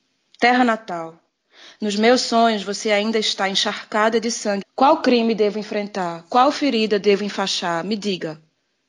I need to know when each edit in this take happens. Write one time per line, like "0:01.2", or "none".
0:04.6